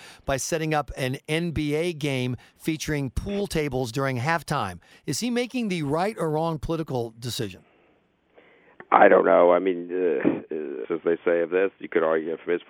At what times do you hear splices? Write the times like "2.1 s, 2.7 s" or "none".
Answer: 4.9 s, 10.8 s